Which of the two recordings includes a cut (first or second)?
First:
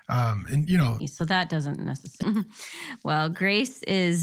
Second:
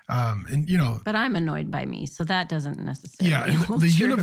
first